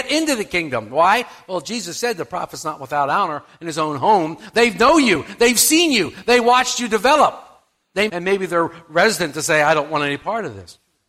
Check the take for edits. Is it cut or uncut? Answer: cut